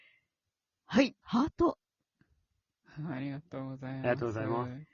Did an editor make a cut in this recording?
yes; 1 cut; at 1.2 s

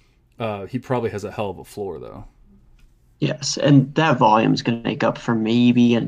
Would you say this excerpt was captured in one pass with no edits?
yes; 0 cuts

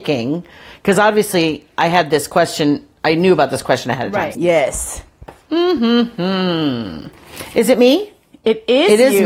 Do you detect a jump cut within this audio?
yes; 1 cut; at 4.3 s

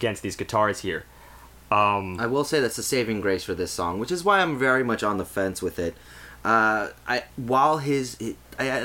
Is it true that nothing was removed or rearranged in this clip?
no; 1 cut; at 7.3 s

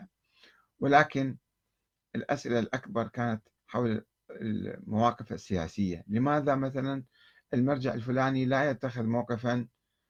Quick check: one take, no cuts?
no; 1 cut; at 3.6 s

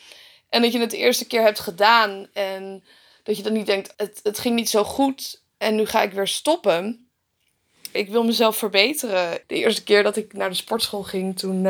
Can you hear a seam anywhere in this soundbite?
yes; 3 cuts; at 3.9 s, 7.9 s, 9.4 s

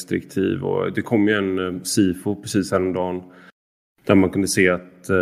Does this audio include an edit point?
no; 0 cuts

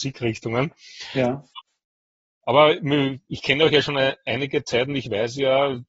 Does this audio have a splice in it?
no; 0 cuts

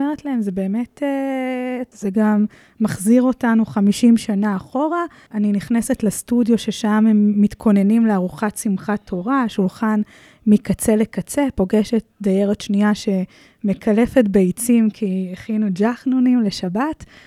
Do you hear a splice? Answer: yes; 2 cuts; at 1.9 s, 5.3 s

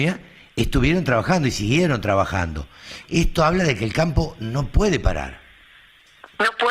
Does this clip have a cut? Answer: yes; 1 cut; at 3.0 s

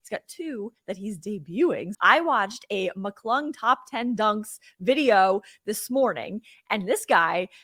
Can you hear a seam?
yes; 1 cut; at 1.9 s

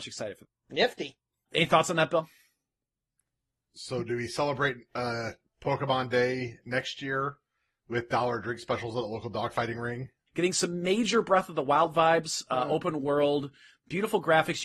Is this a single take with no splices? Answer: no; 1 cut; at 10.3 s

